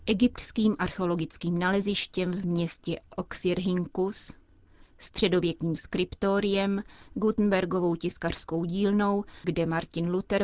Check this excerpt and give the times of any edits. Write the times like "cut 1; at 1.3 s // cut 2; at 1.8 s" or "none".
cut 1; at 9.4 s

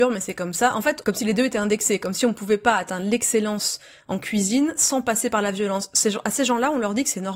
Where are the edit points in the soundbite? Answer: cut 1; at 1.0 s

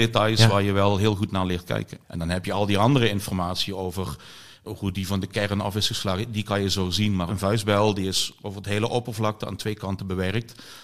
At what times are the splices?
cut 1; at 2.0 s // cut 2; at 7.3 s

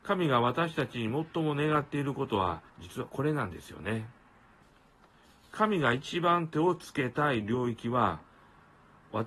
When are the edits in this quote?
cut 1; at 2.7 s

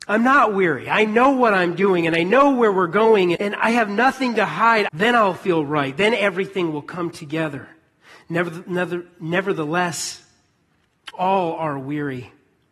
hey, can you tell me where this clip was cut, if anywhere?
cut 1; at 3.4 s // cut 2; at 4.9 s

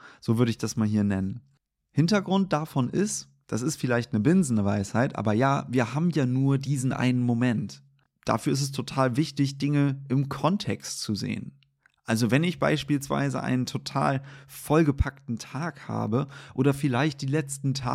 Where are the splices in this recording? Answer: none

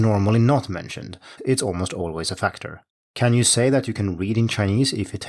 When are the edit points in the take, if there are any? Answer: cut 1; at 1.4 s

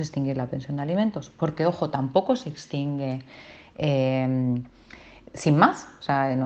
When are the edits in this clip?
none

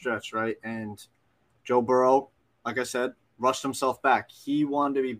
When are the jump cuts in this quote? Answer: none

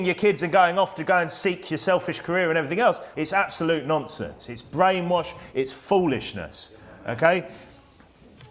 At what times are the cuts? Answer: cut 1; at 3.1 s

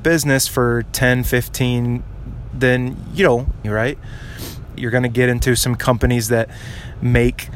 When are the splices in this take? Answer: cut 1; at 2.5 s // cut 2; at 3.6 s // cut 3; at 4.8 s

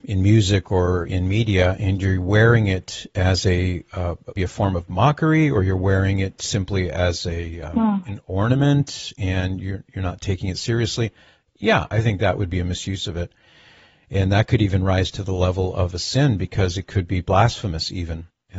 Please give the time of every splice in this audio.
cut 1; at 4.4 s

